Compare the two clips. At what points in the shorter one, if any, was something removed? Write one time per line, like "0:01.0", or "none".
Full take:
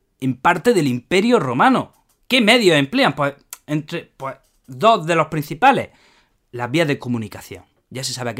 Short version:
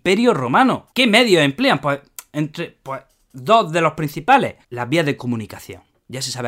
0:00.9
0:04.6